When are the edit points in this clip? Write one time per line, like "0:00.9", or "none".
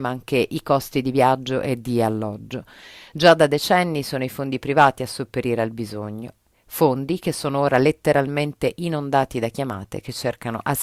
0:03.1